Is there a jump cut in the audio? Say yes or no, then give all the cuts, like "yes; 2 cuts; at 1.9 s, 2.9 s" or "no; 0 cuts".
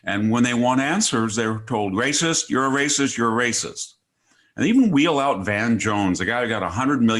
no; 0 cuts